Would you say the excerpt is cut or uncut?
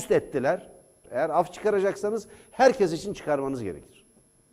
cut